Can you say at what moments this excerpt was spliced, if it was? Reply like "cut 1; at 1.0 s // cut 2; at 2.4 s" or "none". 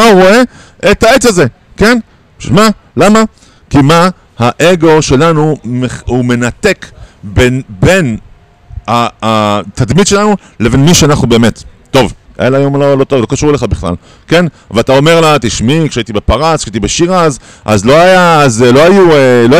cut 1; at 12.3 s